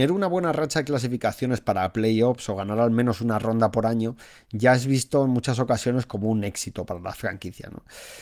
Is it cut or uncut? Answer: uncut